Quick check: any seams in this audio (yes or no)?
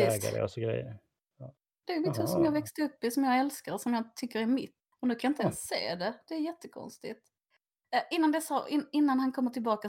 yes